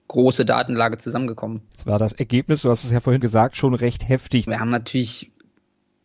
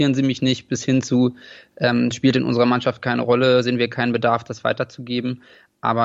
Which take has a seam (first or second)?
first